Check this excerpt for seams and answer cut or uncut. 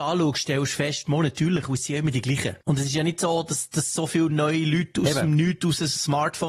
cut